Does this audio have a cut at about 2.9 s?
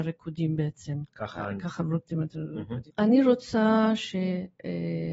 yes; 1 cut; at 2.9 s

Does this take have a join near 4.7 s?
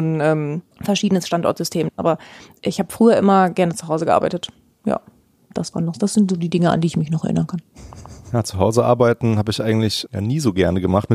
no; 1 cut; at 2.0 s

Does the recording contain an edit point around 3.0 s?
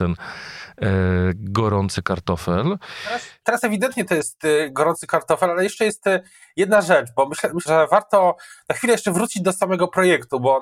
no; 1 cut; at 7.7 s

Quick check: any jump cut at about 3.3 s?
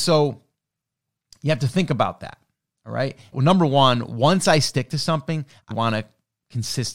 yes; 2 cuts; at 3.3 s, 5.7 s

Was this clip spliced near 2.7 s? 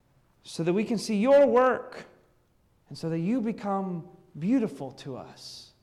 yes; 1 cut; at 2.7 s

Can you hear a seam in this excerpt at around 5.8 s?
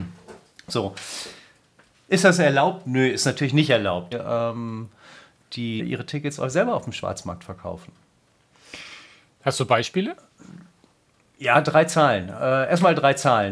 yes; 2 cuts; at 4.1 s, 5.8 s

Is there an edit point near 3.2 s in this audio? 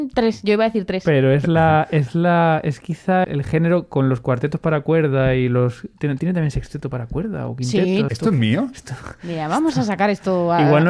yes; 2 cuts; at 3.2 s, 8.1 s

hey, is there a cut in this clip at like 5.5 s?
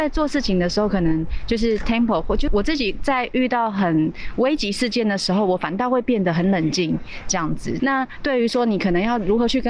no; 2 cuts; at 2.5 s, 7.8 s

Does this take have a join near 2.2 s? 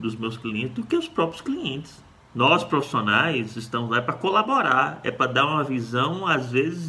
yes; 1 cut; at 2.2 s

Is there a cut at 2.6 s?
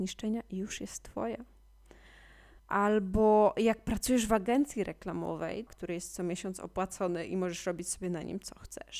yes; 2 cuts; at 2.6 s, 5.7 s

